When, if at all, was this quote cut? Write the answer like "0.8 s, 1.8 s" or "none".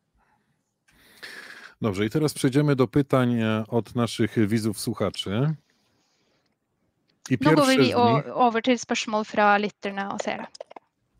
none